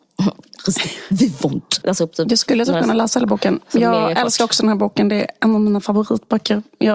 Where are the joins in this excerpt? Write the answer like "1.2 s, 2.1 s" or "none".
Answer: 1.8 s